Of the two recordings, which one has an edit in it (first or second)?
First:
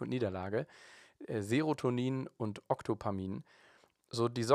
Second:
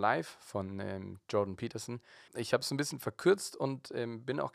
second